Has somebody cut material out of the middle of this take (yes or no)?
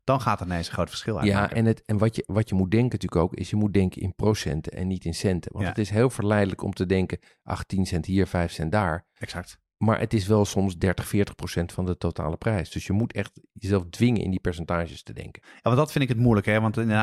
no